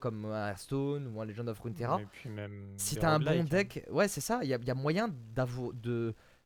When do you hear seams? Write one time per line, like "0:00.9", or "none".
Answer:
none